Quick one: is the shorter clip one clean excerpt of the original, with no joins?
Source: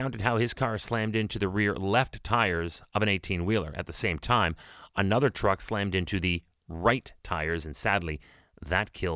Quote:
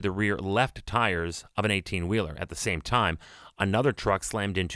yes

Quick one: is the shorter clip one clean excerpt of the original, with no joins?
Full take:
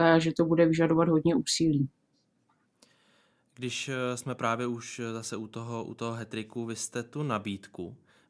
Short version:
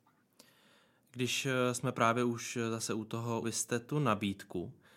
no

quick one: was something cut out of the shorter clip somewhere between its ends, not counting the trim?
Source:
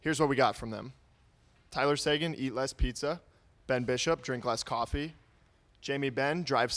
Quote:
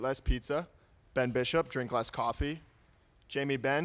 no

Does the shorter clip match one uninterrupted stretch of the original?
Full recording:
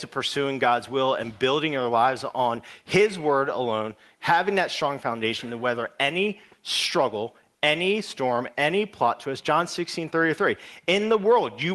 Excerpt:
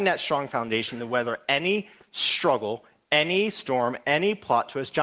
yes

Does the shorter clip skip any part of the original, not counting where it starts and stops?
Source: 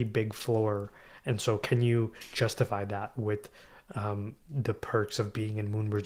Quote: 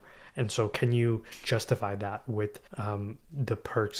yes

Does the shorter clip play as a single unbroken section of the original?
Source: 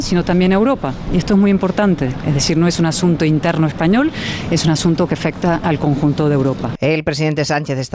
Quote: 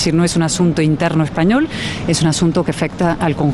yes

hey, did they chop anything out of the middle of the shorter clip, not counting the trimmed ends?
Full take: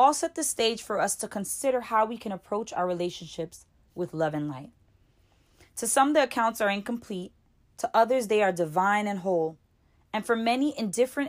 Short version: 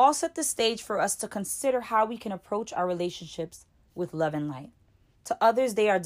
yes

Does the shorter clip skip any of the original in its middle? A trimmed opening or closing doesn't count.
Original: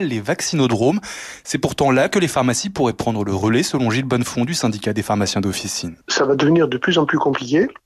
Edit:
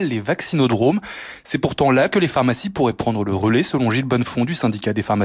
no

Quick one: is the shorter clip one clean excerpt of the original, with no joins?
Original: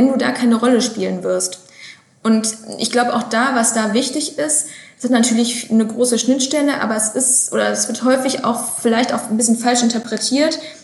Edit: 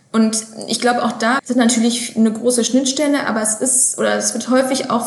no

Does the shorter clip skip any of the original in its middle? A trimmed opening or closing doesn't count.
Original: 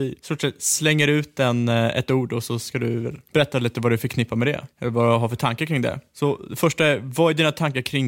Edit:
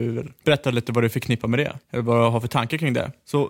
no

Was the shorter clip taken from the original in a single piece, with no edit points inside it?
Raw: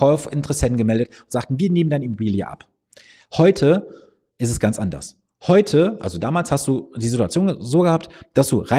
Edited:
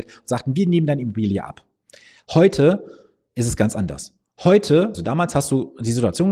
no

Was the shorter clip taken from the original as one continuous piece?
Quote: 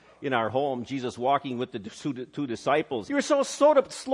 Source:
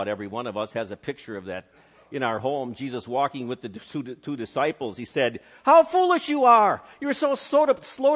no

